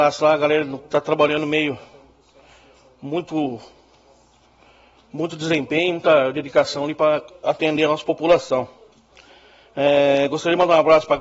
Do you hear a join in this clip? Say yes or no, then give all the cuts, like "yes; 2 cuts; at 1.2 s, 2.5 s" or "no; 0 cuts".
no; 0 cuts